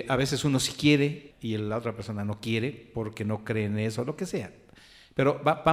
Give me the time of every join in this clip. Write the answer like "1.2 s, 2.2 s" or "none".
1.3 s